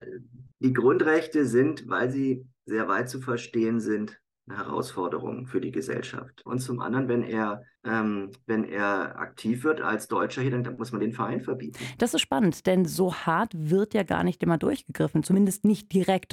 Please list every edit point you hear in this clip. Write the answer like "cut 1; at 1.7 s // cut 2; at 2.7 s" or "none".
cut 1; at 6.5 s